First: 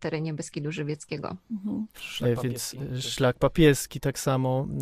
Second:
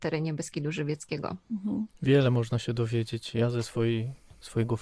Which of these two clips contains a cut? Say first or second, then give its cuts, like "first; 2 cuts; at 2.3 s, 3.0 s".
first; 1 cut; at 1.9 s